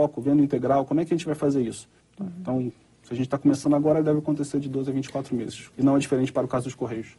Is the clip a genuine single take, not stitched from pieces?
no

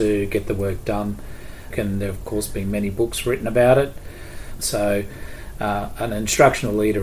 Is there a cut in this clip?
yes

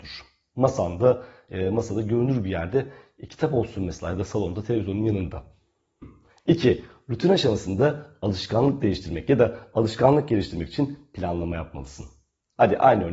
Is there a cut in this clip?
no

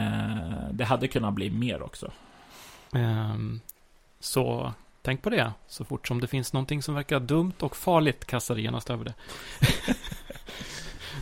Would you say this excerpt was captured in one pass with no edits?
no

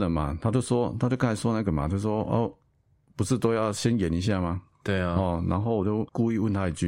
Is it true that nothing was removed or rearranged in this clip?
yes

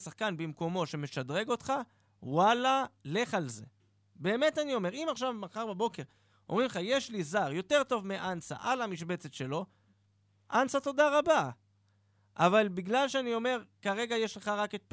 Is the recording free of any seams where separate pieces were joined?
yes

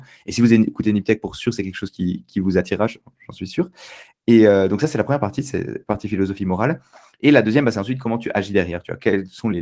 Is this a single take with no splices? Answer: yes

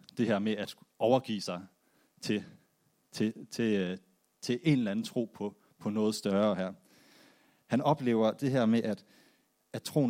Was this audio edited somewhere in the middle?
no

